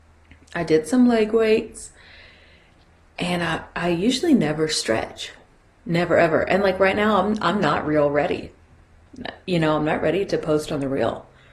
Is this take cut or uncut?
uncut